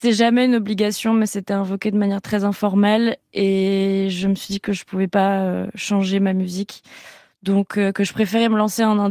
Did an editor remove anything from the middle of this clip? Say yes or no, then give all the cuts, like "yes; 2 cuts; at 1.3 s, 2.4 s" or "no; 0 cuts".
no; 0 cuts